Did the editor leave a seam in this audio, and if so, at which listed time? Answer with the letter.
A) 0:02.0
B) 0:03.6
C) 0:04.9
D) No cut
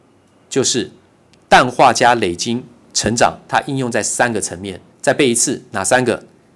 C